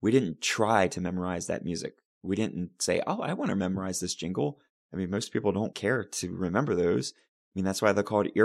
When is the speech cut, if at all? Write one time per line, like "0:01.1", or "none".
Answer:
none